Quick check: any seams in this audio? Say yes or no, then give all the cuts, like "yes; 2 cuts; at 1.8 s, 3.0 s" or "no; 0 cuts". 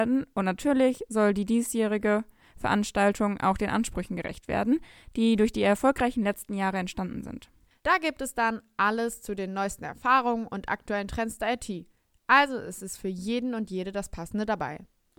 yes; 1 cut; at 7.7 s